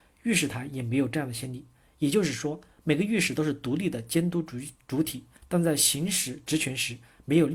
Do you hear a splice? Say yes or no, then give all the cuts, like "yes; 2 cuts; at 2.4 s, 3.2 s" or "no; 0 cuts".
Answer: yes; 2 cuts; at 1.8 s, 5.4 s